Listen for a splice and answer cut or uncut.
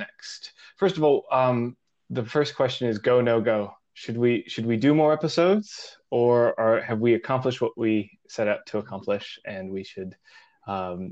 uncut